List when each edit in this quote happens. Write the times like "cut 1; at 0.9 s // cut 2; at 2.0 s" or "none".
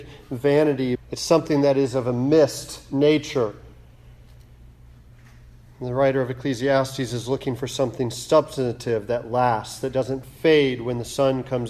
cut 1; at 0.9 s